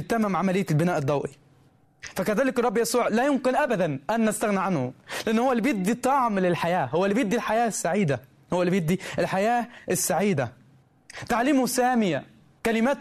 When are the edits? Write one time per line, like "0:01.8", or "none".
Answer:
none